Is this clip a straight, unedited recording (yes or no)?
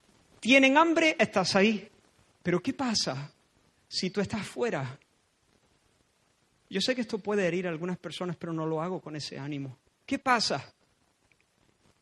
no